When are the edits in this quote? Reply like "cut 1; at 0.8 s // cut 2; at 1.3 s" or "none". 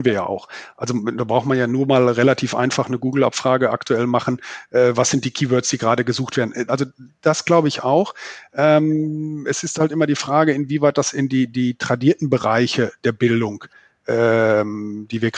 cut 1; at 6.7 s

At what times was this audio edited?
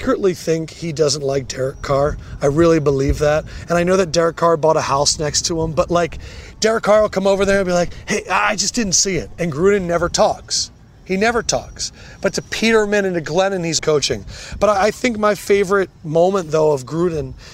cut 1; at 13.8 s

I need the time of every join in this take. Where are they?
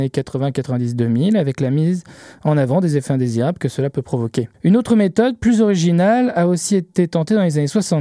cut 1; at 4.5 s

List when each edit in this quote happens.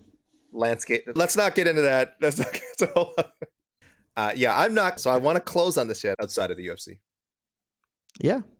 cut 1; at 1.2 s // cut 2; at 5.0 s // cut 3; at 6.1 s

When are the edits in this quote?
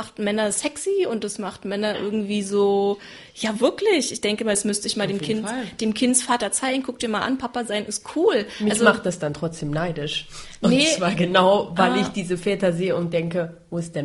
none

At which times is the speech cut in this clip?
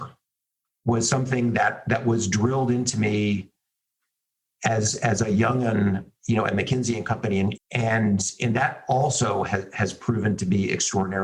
cut 1; at 7.5 s

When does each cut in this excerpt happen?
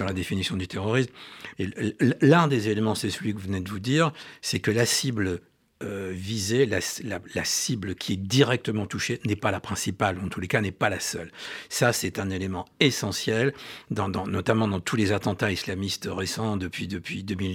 cut 1; at 1.5 s

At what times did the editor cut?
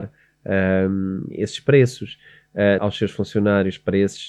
cut 1; at 2.8 s

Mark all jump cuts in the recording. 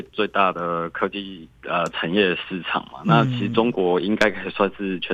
cut 1; at 1.5 s

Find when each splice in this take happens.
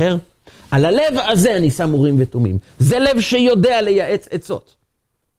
none

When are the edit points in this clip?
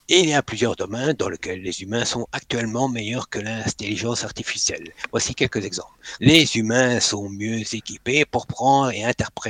cut 1; at 6.2 s

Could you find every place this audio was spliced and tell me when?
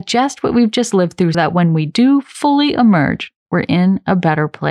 cut 1; at 1.3 s

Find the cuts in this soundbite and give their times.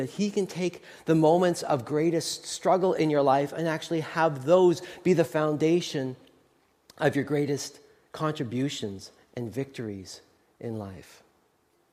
none

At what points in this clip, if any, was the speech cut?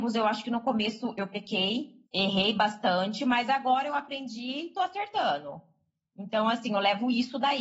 cut 1; at 2.1 s

